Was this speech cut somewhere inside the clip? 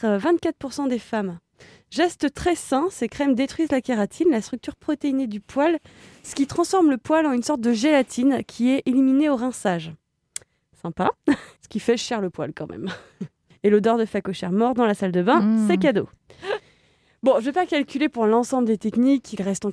yes; 2 cuts; at 11.6 s, 13.5 s

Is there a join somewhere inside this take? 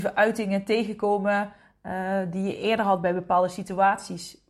no; 0 cuts

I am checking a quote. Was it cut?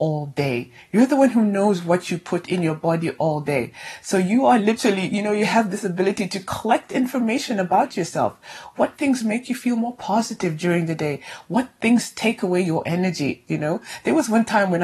no; 0 cuts

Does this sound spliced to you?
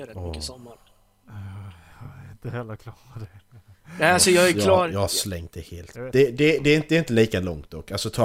yes; 1 cut; at 5.9 s

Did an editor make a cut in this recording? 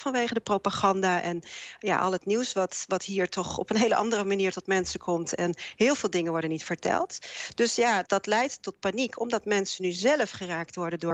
yes; 1 cut; at 8.1 s

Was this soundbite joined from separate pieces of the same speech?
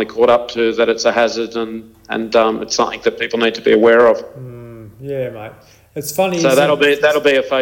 no; 0 cuts

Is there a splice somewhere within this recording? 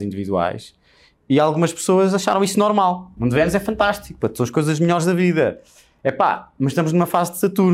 yes; 1 cut; at 3.2 s

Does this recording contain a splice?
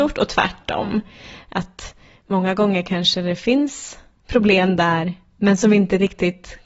no; 0 cuts

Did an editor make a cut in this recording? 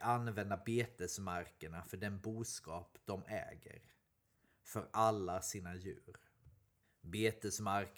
no; 0 cuts

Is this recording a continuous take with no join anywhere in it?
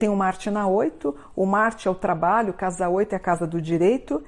yes; 0 cuts

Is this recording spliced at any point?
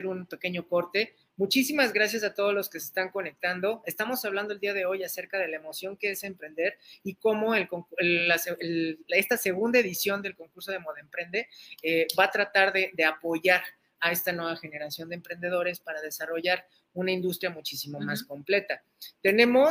no; 0 cuts

